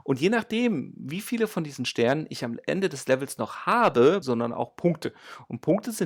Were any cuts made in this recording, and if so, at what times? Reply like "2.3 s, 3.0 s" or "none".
4.2 s